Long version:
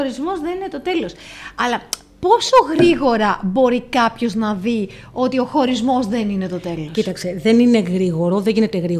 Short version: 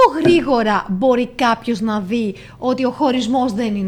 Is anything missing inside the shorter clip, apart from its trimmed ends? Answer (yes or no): no